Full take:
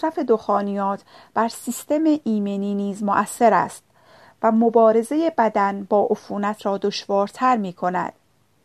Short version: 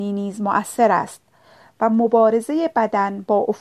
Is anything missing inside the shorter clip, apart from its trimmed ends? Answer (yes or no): no